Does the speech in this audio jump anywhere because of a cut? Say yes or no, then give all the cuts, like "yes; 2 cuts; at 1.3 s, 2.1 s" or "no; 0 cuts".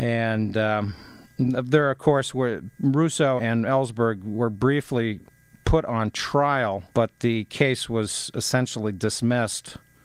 yes; 2 cuts; at 3.4 s, 6.9 s